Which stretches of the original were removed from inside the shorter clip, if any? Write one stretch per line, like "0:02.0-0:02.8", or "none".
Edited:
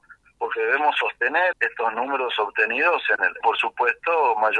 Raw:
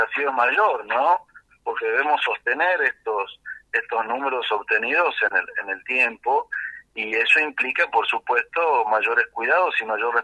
0:02.8-0:03.6
0:05.5-0:07.9